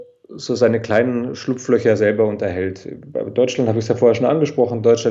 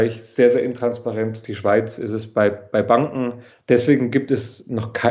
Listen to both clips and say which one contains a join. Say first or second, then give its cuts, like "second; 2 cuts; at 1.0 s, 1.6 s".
second; 1 cut; at 3.5 s